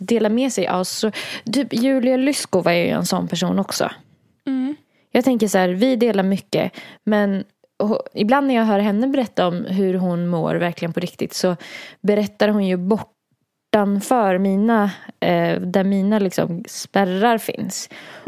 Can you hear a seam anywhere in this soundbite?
yes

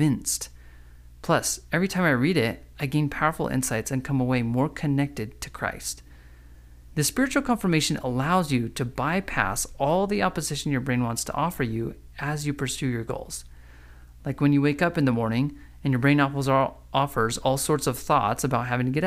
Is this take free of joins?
yes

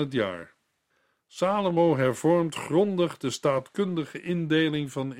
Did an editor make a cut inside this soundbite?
no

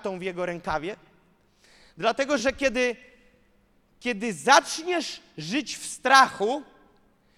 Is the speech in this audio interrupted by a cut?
no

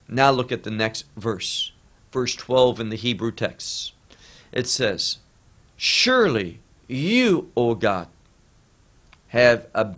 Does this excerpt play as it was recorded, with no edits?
yes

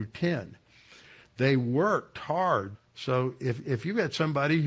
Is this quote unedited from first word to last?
no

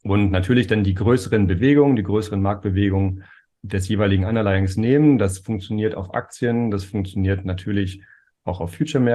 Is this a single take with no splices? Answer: no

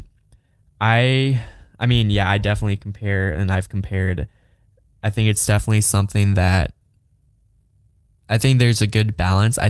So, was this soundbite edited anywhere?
no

